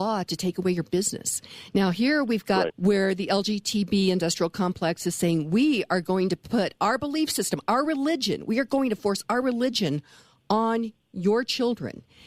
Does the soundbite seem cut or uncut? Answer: cut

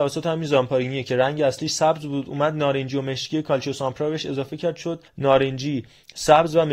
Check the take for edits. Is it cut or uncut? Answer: cut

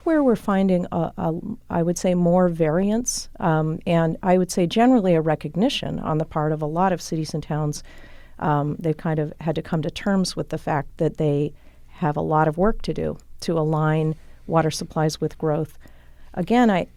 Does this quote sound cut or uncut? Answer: uncut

